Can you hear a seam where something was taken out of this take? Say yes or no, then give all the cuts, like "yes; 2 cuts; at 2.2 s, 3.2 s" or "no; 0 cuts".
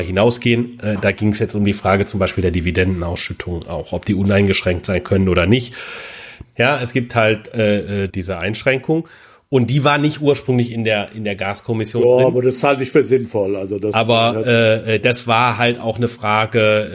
yes; 2 cuts; at 6.4 s, 8.1 s